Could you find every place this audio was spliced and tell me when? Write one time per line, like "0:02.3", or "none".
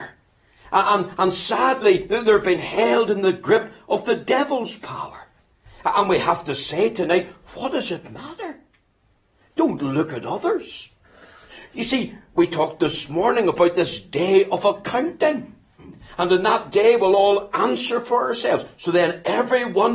none